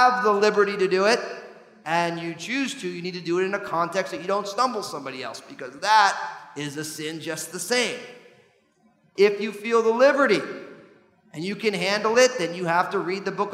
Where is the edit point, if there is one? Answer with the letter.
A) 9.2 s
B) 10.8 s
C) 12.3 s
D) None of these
A